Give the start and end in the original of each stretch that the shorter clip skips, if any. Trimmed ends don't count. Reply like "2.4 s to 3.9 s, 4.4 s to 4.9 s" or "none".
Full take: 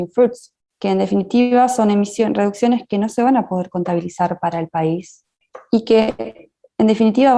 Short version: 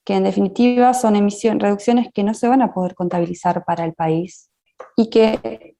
none